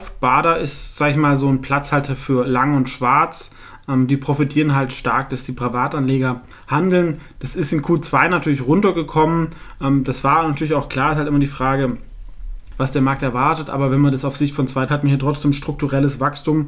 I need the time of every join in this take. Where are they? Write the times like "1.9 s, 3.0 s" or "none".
12.7 s, 14.9 s